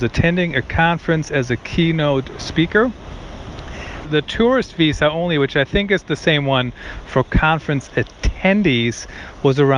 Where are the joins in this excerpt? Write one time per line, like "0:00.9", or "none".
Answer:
0:04.0